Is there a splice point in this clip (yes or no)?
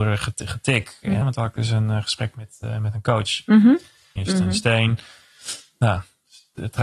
yes